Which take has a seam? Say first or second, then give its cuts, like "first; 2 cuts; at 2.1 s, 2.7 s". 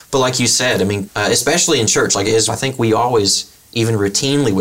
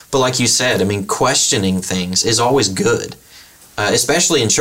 first; 2 cuts; at 1.1 s, 2.5 s